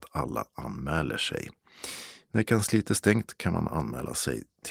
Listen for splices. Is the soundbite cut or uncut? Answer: cut